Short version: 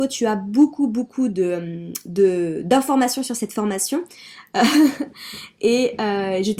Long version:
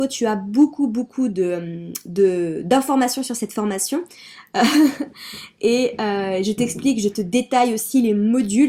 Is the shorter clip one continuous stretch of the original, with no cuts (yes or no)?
yes